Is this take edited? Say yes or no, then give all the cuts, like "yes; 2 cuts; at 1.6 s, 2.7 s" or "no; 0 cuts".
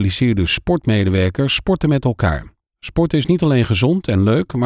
no; 0 cuts